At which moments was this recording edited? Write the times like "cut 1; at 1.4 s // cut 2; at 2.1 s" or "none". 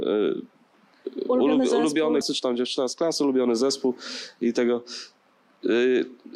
cut 1; at 2.2 s